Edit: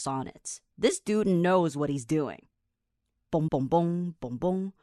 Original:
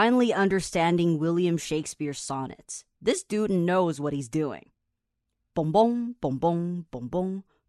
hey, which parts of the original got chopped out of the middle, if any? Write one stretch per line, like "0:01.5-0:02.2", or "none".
0:05.7-0:06.2